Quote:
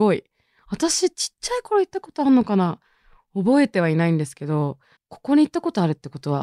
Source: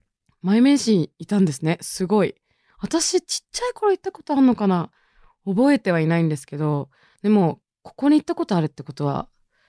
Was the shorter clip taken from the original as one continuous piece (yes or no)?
no